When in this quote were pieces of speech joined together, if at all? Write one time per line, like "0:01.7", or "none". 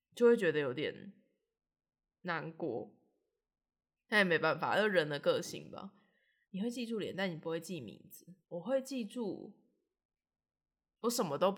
0:06.4
0:08.4